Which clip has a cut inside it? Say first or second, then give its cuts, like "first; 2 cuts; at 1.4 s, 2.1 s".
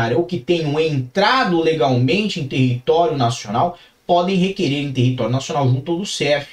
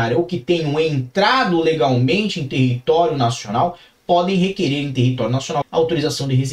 second; 1 cut; at 5.6 s